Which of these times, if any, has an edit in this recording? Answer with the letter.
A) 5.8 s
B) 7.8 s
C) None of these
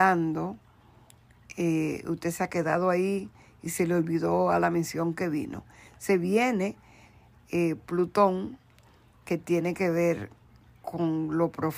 C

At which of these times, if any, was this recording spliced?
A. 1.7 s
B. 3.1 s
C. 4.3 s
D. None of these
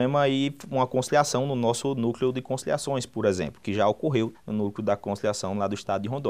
C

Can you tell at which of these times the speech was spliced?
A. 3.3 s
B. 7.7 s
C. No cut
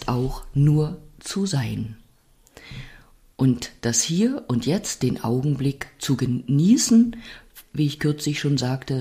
B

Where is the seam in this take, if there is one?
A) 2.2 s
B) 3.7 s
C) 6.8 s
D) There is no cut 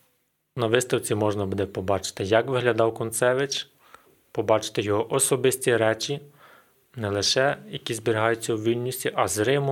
D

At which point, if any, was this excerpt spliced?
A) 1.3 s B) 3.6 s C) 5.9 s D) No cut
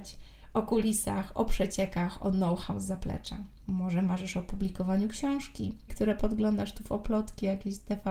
C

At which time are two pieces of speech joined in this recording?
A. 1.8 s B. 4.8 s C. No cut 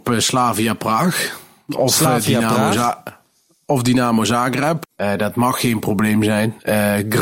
B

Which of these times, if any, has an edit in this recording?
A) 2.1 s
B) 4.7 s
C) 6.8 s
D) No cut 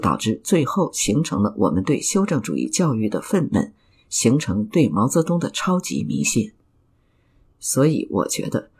D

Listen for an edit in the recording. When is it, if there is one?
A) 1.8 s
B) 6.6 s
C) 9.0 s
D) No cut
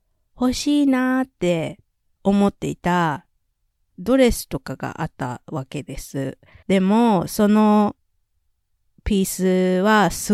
B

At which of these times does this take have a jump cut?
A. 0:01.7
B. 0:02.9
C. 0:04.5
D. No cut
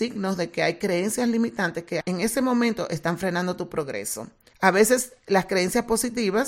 C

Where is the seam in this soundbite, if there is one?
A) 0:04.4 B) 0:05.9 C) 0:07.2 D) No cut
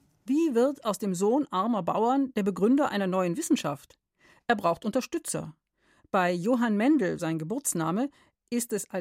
C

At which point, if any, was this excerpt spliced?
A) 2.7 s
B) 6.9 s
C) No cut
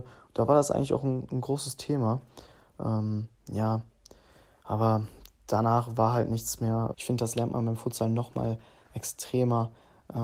B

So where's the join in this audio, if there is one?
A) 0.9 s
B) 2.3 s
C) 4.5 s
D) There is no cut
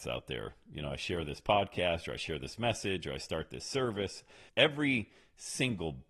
C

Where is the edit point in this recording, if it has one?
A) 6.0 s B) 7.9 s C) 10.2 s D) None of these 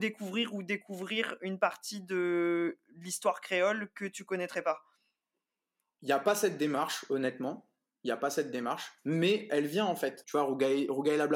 C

